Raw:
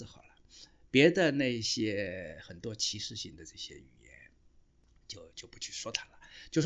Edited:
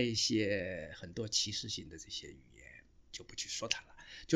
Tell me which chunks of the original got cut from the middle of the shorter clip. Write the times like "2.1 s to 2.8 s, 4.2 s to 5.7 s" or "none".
4.6 s to 5.3 s